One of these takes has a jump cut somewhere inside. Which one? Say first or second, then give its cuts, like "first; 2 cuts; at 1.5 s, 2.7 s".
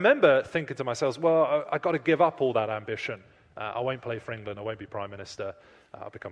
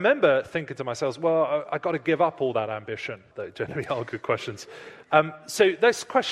second; 2 cuts; at 3.3 s, 5.0 s